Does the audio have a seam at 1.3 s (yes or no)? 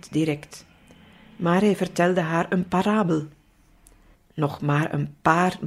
no